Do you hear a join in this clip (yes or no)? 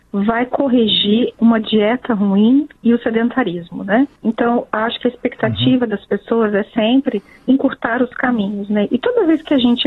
no